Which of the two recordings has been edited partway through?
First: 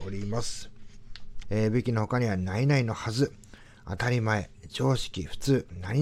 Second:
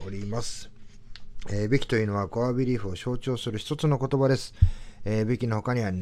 first; 1 cut; at 1.4 s

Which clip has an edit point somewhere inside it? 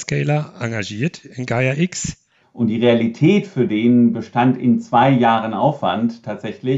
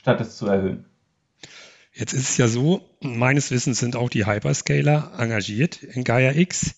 first; 1 cut; at 2.4 s

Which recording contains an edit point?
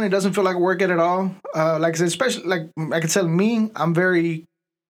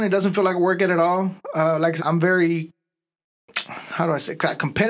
second; 1 cut; at 2.0 s

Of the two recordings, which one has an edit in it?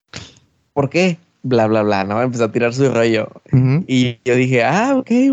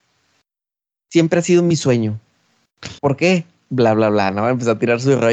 second; 1 cut; at 3.0 s

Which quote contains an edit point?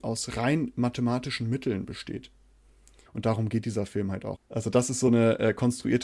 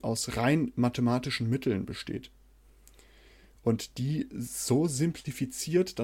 first; 2 cuts; at 3.1 s, 4.4 s

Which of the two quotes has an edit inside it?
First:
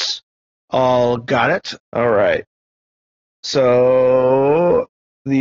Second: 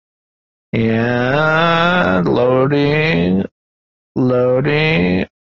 first; 1 cut; at 1.8 s

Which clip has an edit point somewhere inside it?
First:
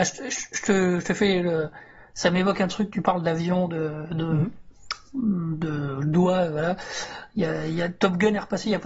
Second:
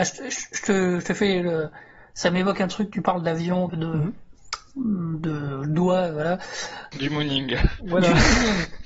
second; 2 cuts; at 3.7 s, 6.9 s

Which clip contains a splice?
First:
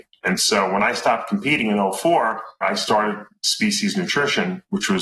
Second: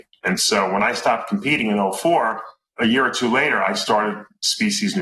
first; 1 cut; at 2.6 s

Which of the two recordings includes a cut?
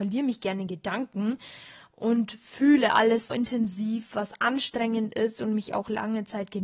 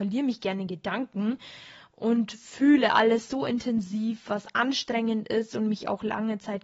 first; 1 cut; at 3.3 s

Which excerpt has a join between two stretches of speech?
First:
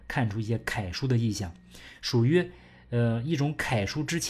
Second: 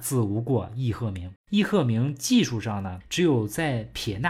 second; 2 cuts; at 1.4 s, 3.0 s

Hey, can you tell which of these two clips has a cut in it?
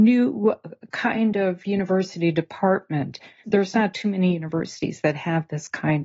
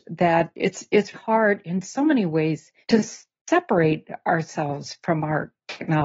second; 2 cuts; at 1.1 s, 2.8 s

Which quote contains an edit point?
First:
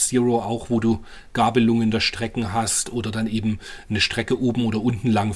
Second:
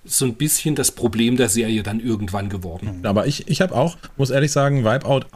second; 1 cut; at 3.0 s

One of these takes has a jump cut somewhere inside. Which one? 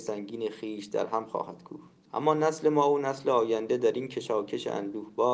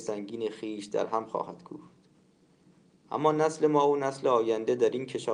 first; 1 cut; at 2.1 s

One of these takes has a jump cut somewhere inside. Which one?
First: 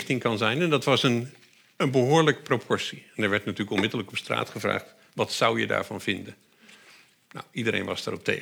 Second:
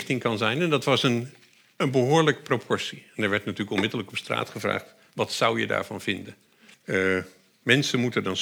second; 1 cut; at 6.7 s

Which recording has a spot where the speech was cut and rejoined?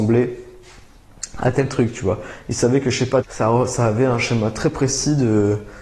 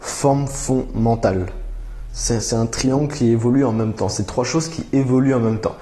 first; 1 cut; at 3.2 s

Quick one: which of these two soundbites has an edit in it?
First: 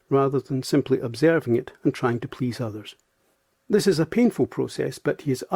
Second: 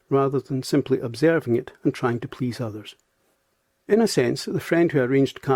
first; 1 cut; at 3.6 s

